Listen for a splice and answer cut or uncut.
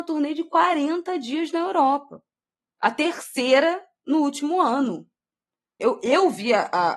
cut